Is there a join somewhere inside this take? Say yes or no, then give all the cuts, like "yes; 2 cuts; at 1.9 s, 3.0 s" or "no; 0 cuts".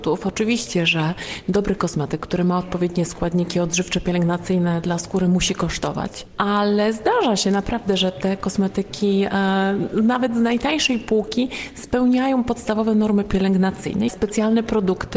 yes; 1 cut; at 14.1 s